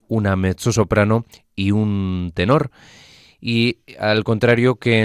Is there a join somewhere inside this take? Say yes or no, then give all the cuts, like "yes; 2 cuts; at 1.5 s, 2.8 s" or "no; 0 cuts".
no; 0 cuts